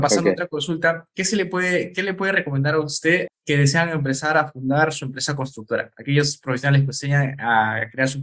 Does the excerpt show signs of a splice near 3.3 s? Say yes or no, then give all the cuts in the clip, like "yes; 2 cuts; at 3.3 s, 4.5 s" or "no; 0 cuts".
yes; 1 cut; at 3.3 s